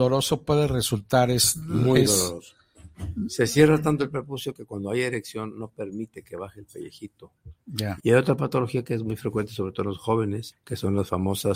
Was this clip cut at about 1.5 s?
no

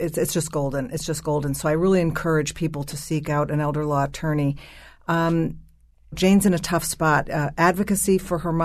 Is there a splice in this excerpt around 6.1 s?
yes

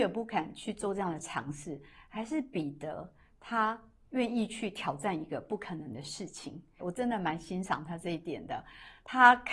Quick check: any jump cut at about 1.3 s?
no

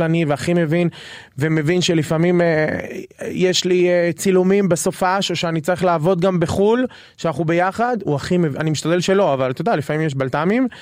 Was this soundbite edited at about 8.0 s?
yes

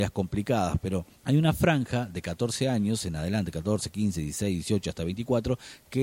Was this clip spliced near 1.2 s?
yes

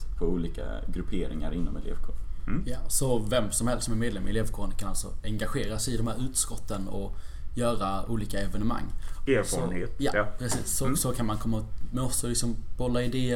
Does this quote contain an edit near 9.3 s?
yes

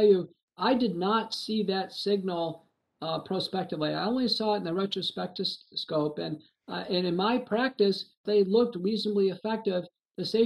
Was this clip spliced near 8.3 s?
yes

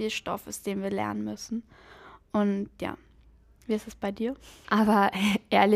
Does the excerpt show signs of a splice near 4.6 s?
yes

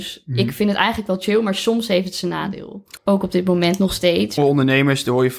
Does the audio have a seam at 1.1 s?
no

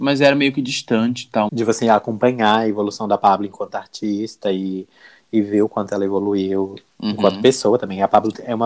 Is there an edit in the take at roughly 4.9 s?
no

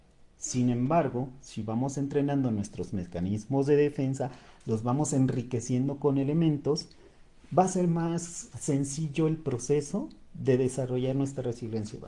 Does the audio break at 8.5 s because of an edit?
yes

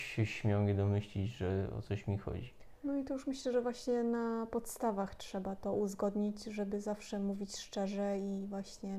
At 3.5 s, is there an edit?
no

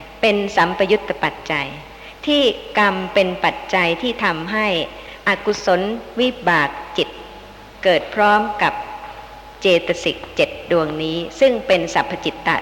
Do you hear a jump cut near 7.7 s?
yes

